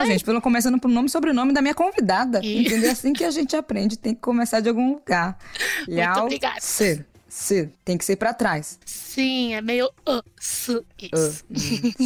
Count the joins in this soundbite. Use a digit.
0